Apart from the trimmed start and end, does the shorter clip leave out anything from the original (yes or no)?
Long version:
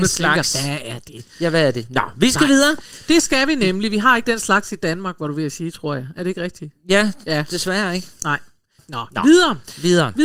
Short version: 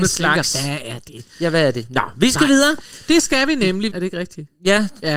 yes